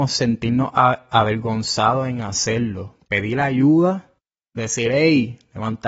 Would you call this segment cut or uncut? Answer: uncut